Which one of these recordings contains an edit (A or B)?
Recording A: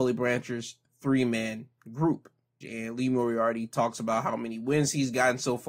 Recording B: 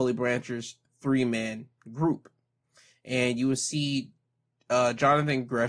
A